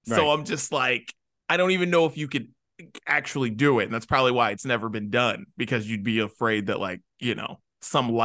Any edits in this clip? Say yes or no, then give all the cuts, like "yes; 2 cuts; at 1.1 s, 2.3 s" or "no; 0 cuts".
no; 0 cuts